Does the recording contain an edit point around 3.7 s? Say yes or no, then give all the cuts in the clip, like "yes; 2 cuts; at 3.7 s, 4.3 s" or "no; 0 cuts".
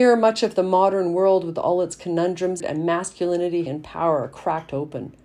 yes; 2 cuts; at 2.6 s, 3.7 s